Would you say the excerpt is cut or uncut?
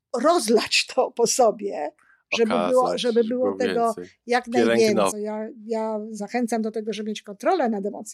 cut